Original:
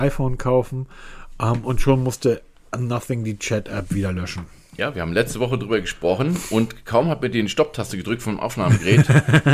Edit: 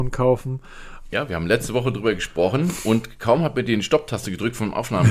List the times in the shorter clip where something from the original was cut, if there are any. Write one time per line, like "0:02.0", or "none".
0:01.1